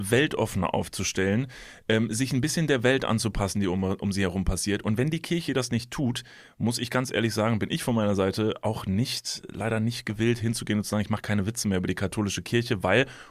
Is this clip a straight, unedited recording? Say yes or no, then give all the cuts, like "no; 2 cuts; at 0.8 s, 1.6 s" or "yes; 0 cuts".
yes; 0 cuts